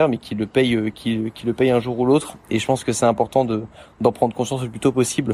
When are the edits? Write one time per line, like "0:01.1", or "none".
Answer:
none